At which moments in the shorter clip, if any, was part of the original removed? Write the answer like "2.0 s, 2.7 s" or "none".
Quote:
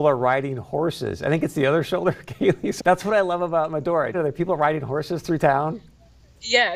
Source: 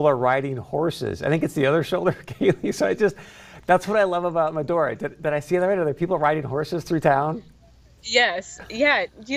2.8 s, 4.1 s